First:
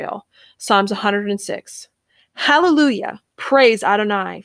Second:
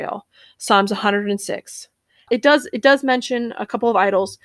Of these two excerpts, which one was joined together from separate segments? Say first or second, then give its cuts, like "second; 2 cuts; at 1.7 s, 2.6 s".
second; 1 cut; at 2.3 s